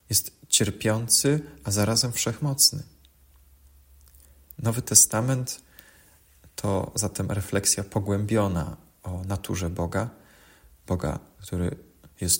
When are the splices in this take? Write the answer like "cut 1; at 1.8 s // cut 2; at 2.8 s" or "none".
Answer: none